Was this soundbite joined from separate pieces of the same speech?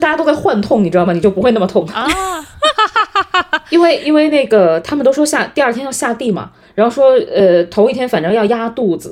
no; 0 cuts

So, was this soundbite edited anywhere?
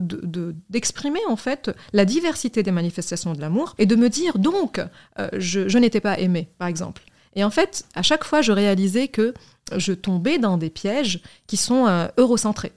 yes; 1 cut; at 3.8 s

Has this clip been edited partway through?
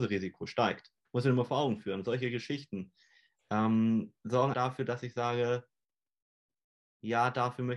yes; 2 cuts; at 1.0 s, 4.5 s

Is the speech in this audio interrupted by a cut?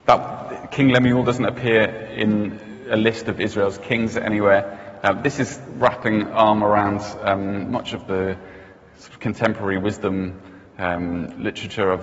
no; 0 cuts

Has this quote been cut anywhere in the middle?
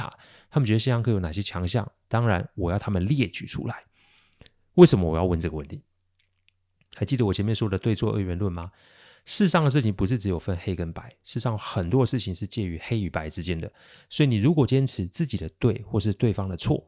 no; 0 cuts

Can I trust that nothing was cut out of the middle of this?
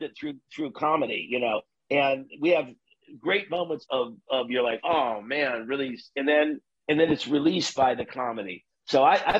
no; 1 cut; at 3.8 s

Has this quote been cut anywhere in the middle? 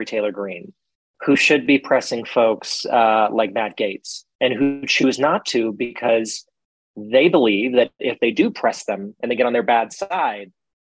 no; 0 cuts

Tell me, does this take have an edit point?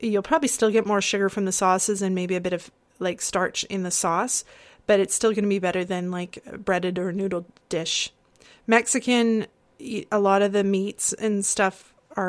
no; 0 cuts

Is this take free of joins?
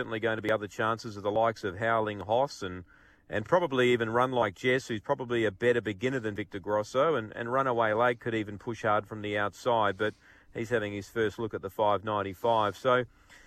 yes; 0 cuts

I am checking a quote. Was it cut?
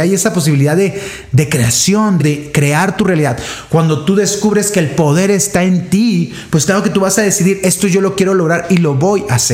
yes; 1 cut; at 2.2 s

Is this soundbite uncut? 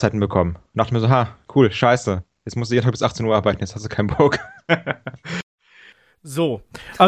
yes; 0 cuts

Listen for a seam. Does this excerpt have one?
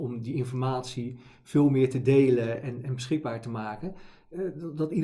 no; 0 cuts

